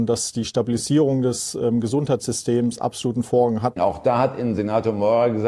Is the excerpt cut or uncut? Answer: cut